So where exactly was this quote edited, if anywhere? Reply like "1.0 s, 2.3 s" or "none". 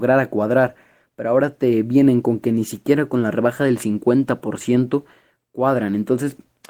none